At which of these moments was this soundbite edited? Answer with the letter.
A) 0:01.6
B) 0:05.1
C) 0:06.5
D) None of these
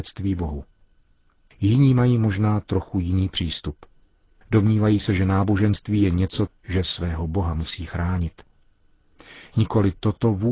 C